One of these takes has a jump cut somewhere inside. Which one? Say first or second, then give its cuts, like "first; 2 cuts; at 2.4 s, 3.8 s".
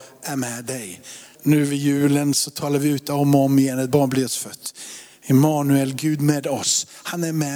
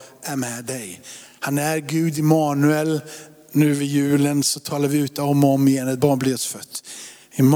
first; 1 cut; at 1.4 s